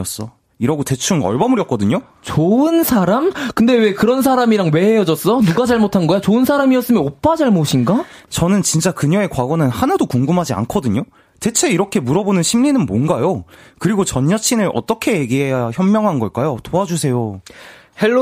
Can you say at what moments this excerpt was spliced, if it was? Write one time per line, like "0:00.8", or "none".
0:08.3